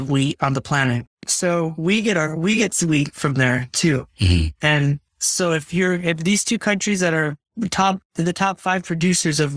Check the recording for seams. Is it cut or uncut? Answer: cut